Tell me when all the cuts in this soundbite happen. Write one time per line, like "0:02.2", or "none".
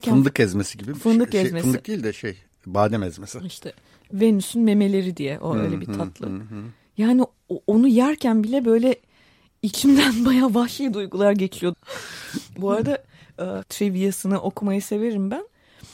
0:11.7
0:13.6

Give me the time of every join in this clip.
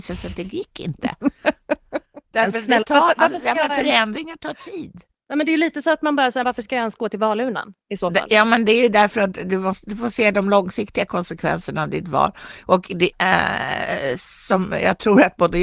0:06.4
0:13.1

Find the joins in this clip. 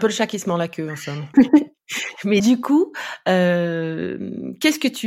0:01.3
0:02.4

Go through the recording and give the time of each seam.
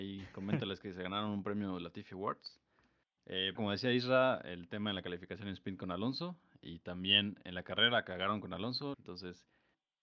0:03.6
0:08.9

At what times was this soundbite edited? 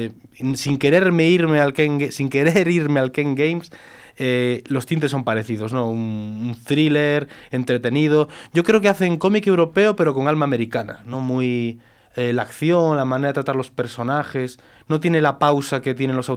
none

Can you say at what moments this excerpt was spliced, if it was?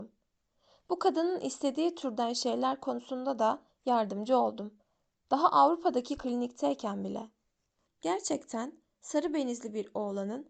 0:07.9

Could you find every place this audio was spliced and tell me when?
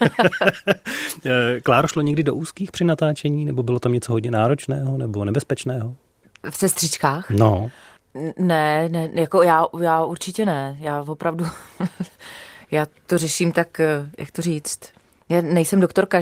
none

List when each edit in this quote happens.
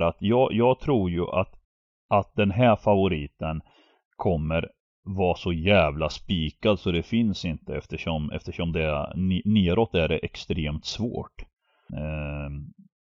0:11.9

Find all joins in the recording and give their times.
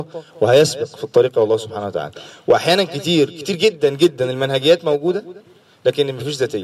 none

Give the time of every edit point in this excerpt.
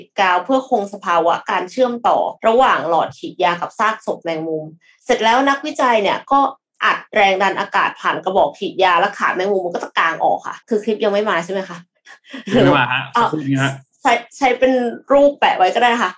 0:02.4
0:10.6

